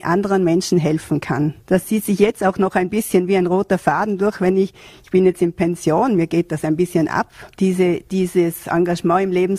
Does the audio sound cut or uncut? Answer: cut